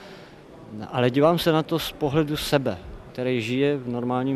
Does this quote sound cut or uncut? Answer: cut